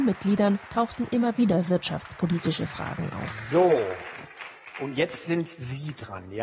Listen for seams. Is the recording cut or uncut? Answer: uncut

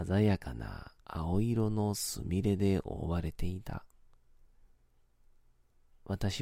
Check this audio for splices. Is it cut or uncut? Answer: cut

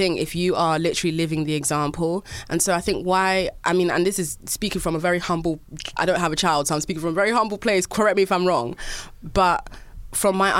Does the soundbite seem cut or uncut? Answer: cut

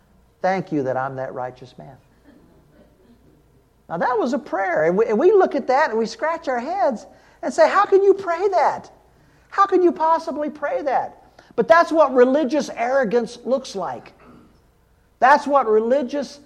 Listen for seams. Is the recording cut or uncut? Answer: uncut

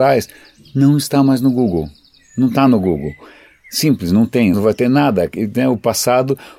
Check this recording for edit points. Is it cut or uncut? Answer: cut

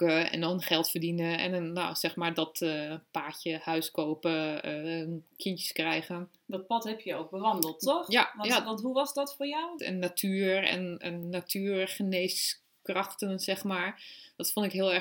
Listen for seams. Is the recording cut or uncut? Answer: cut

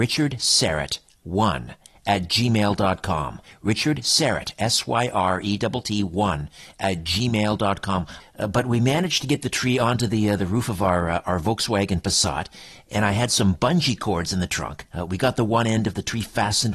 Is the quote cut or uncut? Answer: cut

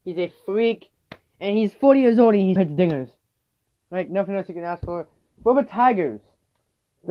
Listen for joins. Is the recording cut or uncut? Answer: cut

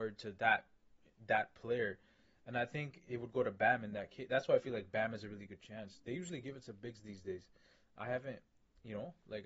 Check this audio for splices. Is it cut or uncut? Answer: uncut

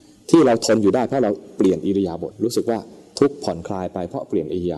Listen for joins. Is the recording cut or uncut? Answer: cut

